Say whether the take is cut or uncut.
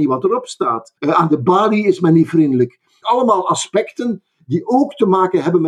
cut